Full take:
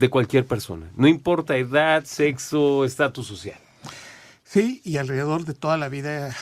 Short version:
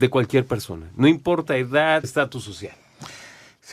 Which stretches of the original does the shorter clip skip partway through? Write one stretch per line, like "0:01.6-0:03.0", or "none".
0:02.0-0:02.9